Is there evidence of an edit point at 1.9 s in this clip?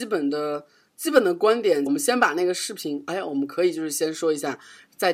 yes; 1 cut; at 1.9 s

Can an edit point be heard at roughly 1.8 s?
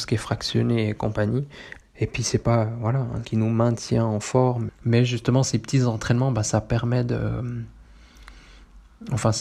yes; 3 cuts; at 1.8 s, 3.2 s, 4.7 s

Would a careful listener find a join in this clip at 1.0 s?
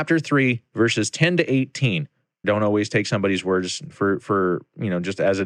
no; 2 cuts; at 2.4 s, 3.9 s

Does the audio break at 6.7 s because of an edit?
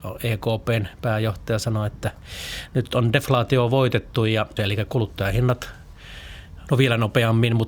yes; 2 cuts; at 4.6 s, 6.7 s

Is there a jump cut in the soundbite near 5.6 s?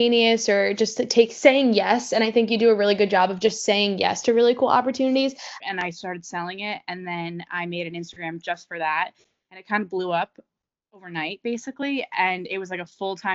yes; 1 cut; at 5.6 s

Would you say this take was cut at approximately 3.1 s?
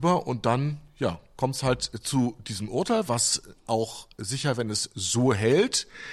yes; 1 cut; at 3.1 s

